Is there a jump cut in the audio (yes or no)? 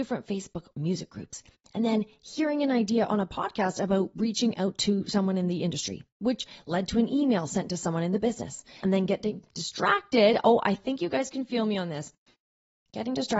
yes